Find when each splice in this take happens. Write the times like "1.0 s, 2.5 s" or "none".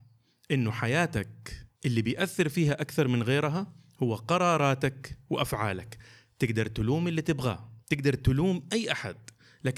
1.7 s, 7.8 s

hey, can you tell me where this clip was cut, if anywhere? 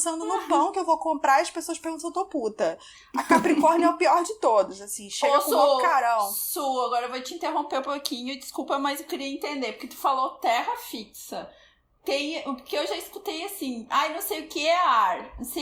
none

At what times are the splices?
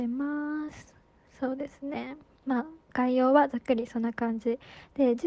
none

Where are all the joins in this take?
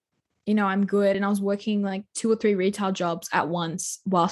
none

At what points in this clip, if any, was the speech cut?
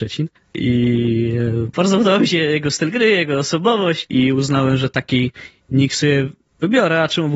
1.7 s

